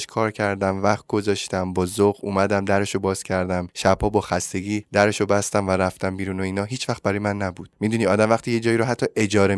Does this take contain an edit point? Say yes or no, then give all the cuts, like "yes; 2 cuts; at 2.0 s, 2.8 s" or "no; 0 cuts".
no; 0 cuts